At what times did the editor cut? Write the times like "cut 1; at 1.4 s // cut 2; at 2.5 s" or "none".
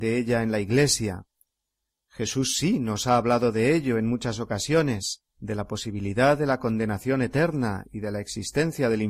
cut 1; at 5.3 s